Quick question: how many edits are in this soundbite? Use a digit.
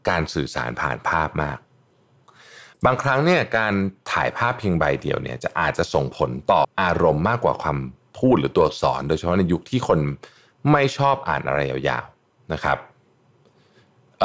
1